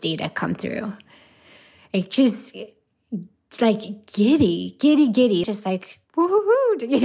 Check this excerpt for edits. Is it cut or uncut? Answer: cut